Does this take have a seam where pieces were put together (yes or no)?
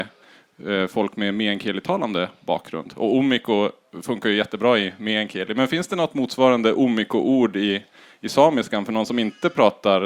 no